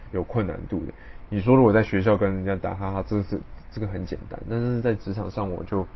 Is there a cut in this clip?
yes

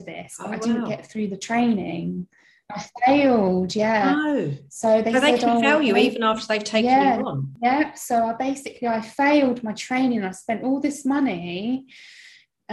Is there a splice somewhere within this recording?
no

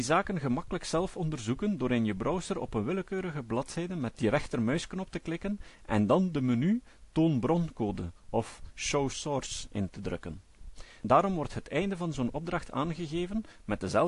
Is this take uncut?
no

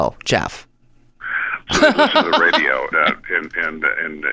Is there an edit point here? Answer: yes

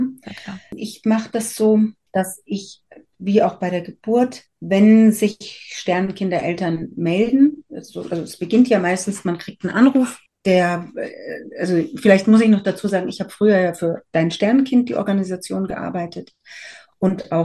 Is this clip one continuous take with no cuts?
yes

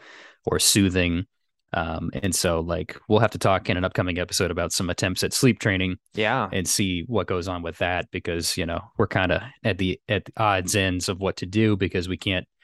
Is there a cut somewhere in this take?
no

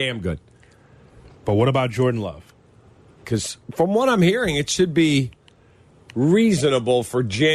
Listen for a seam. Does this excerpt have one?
yes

